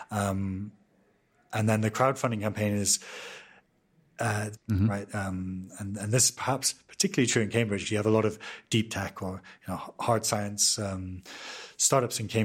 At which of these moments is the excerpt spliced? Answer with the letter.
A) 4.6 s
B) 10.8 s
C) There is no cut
A